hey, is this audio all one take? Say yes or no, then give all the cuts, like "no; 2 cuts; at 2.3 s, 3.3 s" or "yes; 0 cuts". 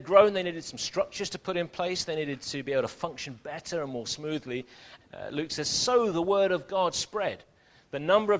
no; 1 cut; at 5.0 s